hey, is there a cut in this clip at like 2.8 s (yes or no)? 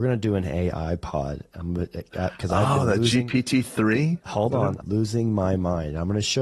no